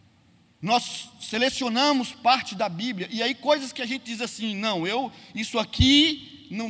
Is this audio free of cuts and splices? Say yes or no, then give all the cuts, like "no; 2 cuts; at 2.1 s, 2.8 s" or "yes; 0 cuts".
yes; 0 cuts